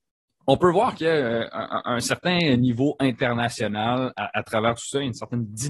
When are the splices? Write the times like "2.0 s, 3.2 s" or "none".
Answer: none